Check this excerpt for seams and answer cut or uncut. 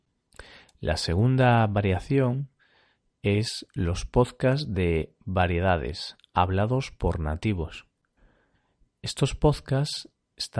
uncut